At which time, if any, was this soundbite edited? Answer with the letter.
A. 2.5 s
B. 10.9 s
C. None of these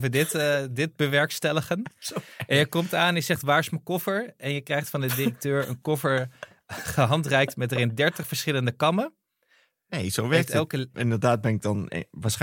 B